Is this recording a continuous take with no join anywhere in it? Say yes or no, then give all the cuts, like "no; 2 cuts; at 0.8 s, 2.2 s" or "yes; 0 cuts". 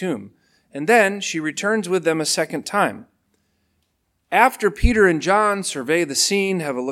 yes; 0 cuts